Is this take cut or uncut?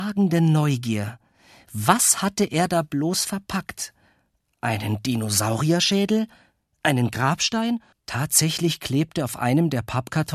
cut